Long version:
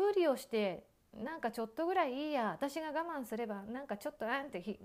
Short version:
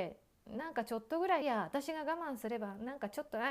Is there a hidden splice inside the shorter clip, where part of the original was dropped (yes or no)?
yes